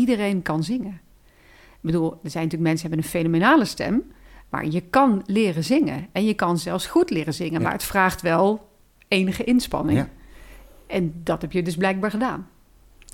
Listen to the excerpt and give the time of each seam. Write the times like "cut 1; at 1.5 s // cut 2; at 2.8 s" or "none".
none